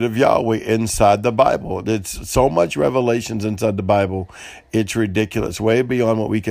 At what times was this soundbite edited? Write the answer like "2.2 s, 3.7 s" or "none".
none